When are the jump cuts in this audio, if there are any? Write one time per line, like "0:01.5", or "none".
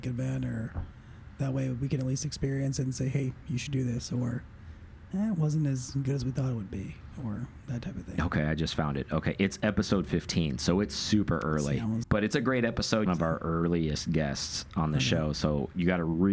0:12.0
0:13.1

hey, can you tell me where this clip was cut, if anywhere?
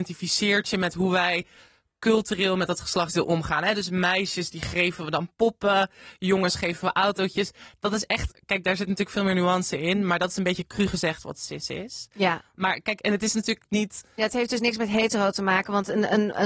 none

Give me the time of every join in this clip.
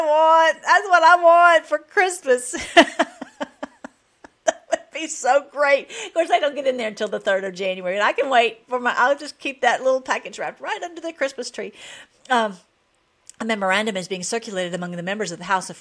none

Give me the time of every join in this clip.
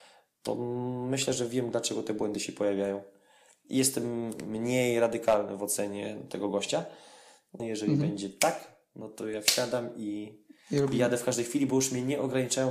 0:07.6

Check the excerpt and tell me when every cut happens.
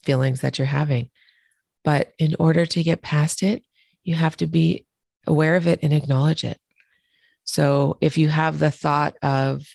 none

